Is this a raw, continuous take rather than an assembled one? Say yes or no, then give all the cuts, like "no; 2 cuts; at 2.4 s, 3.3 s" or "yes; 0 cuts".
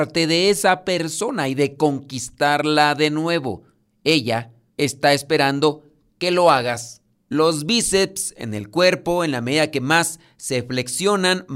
yes; 0 cuts